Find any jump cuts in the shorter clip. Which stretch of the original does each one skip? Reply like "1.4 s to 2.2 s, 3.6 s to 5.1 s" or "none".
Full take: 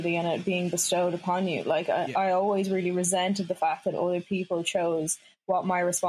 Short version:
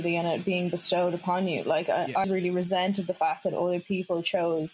2.2 s to 2.7 s